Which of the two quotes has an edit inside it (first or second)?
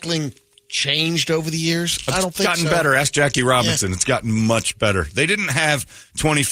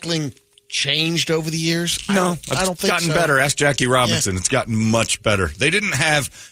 first